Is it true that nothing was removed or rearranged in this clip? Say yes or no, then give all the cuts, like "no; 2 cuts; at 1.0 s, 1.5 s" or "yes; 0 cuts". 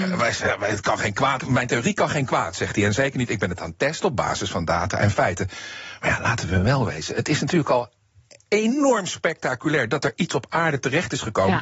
no; 1 cut; at 1.4 s